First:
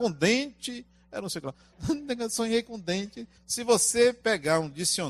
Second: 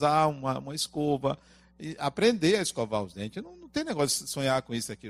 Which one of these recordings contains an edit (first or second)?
first